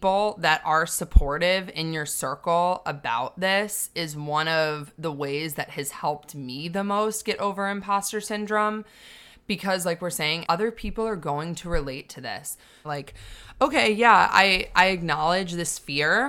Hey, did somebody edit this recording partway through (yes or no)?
yes